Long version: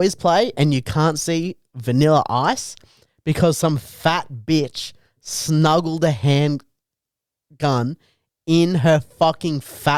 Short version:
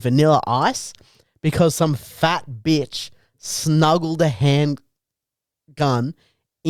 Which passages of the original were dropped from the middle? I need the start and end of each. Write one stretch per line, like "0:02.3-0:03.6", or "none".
none